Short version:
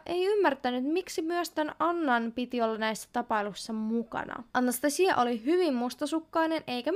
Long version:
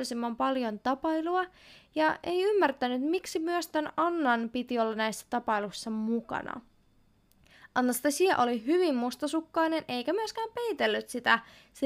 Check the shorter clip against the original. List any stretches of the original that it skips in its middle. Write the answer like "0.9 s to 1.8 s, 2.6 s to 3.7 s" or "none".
6.7 s to 7.7 s

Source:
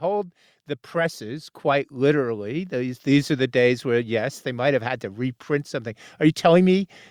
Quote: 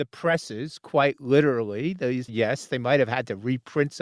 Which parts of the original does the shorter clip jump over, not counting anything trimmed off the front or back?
3.0 s to 4.0 s

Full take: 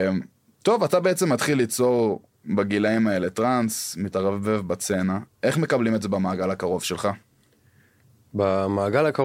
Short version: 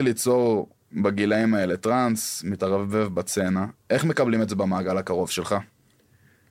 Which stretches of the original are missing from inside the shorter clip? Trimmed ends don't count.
none

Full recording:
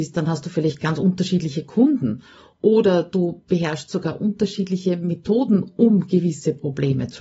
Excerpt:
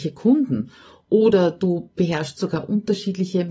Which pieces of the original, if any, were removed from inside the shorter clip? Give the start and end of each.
none

